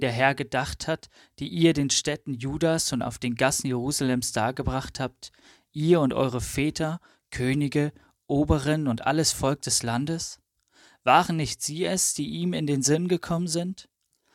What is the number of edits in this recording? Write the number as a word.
zero